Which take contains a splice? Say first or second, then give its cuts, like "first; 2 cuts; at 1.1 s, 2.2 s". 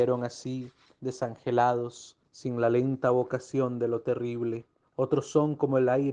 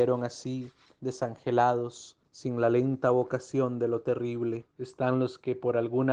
second; 1 cut; at 4.7 s